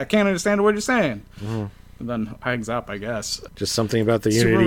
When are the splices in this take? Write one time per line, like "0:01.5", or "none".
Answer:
none